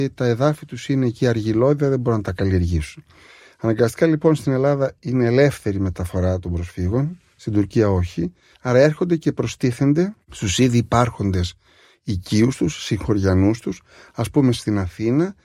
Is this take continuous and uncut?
no; 1 cut; at 8.5 s

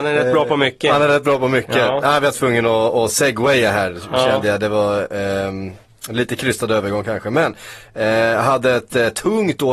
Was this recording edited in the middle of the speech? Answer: no; 0 cuts

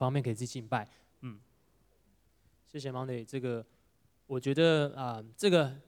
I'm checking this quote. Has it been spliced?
yes; 1 cut; at 1.1 s

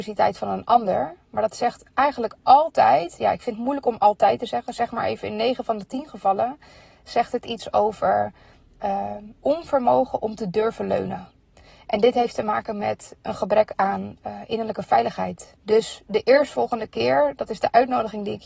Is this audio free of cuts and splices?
no; 2 cuts; at 9.4 s, 15.6 s

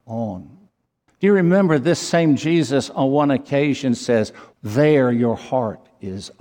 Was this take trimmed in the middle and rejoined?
yes; 2 cuts; at 1.1 s, 4.5 s

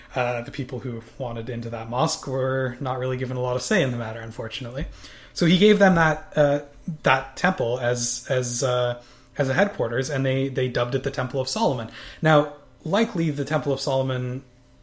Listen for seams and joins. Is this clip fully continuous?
yes; 0 cuts

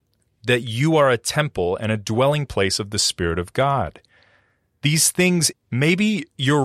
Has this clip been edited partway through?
yes; 1 cut; at 5.5 s

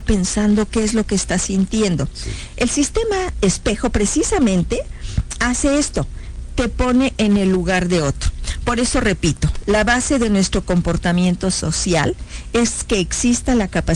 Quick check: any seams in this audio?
no; 0 cuts

